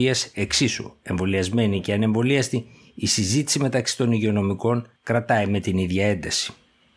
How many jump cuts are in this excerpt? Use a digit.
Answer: 1